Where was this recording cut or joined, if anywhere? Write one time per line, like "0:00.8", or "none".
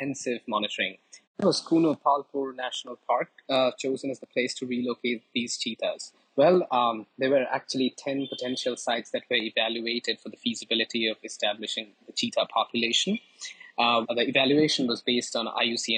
0:01.2
0:14.0